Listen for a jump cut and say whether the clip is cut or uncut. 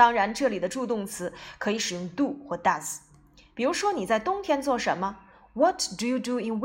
uncut